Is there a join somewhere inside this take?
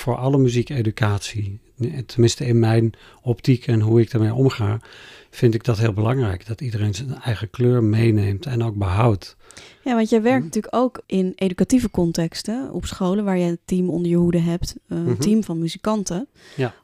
no; 0 cuts

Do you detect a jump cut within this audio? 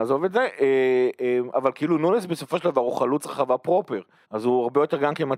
yes; 2 cuts; at 1.5 s, 4.2 s

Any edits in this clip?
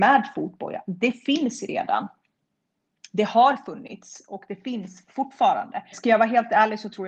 yes; 1 cut; at 5.9 s

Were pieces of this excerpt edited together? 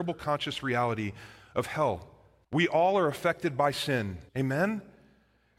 yes; 2 cuts; at 2.4 s, 4.3 s

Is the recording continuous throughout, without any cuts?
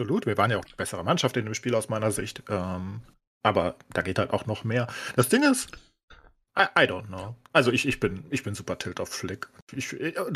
yes; 0 cuts

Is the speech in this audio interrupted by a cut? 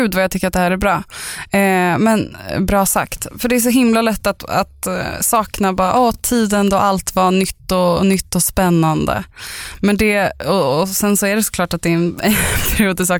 no; 0 cuts

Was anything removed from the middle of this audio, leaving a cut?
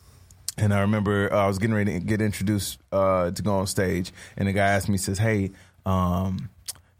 no; 0 cuts

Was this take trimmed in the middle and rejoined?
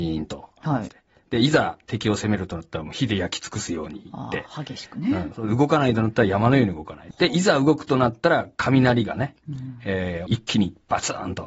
yes; 2 cuts; at 7.1 s, 10.3 s

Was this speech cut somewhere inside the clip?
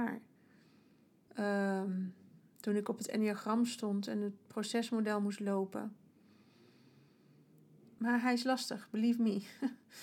yes; 2 cuts; at 1.3 s, 8.0 s

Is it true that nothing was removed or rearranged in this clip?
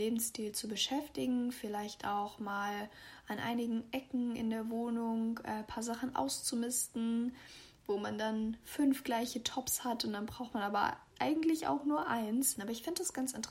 no; 1 cut; at 12.6 s

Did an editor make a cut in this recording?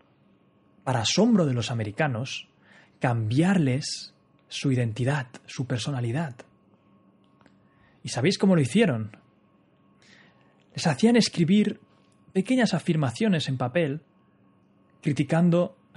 no; 0 cuts

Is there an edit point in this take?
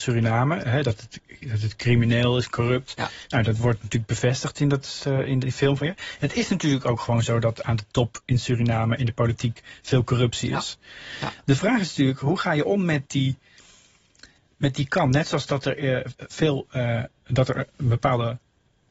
no; 0 cuts

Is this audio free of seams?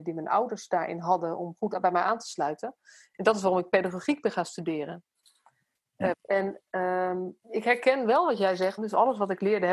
no; 3 cuts; at 6.1 s, 7.4 s, 8.8 s

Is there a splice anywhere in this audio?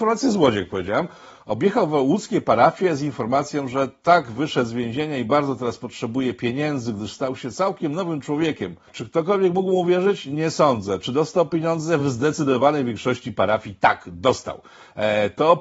no; 0 cuts

